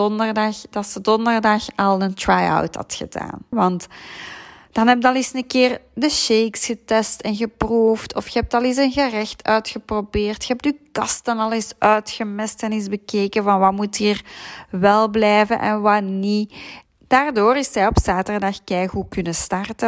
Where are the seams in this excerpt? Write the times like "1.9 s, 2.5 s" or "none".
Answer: 3.5 s, 16.8 s